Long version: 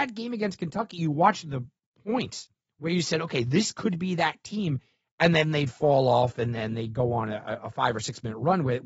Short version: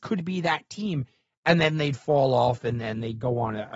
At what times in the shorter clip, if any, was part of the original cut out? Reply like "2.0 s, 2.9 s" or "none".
none